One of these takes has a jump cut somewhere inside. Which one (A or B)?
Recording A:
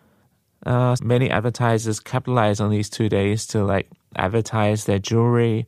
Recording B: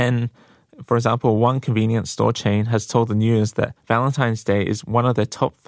A